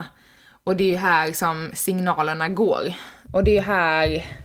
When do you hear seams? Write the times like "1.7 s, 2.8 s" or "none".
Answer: 3.3 s